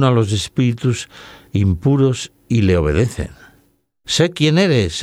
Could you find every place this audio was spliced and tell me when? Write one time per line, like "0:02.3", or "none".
0:04.0